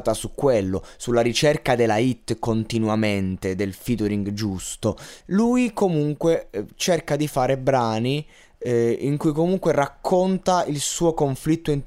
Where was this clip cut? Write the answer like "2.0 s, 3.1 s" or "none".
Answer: 5.2 s